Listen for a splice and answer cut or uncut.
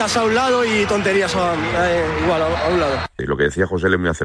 cut